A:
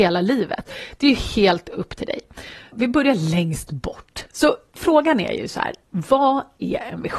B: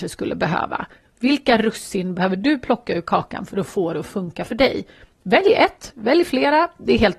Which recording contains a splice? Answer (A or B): A